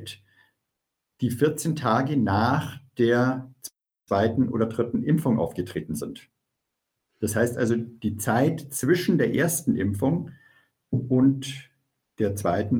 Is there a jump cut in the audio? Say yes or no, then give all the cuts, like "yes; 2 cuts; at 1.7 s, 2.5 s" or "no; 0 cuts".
no; 0 cuts